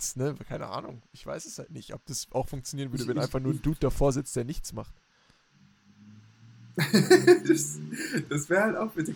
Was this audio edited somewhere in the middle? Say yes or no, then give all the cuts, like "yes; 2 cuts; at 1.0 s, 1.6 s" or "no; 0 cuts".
no; 0 cuts